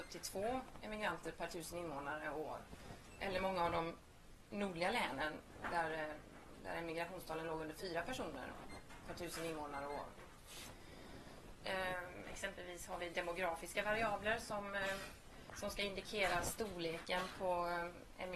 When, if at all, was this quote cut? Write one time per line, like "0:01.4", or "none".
0:11.6